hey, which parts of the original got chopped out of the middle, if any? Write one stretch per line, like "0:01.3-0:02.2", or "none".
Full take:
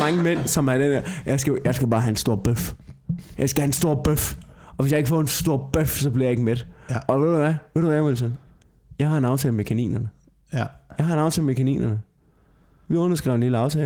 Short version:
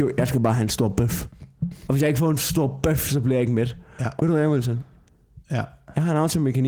0:03.3-0:04.8
0:07.1-0:07.7
0:08.9-0:10.4